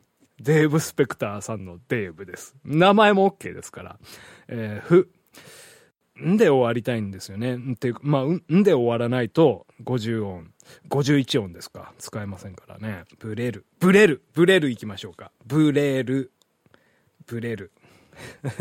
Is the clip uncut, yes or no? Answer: yes